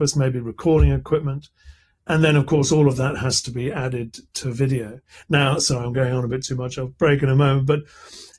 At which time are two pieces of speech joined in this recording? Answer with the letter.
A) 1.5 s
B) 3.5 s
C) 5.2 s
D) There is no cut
D